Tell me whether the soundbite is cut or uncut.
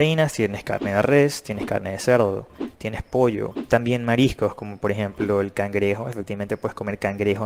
cut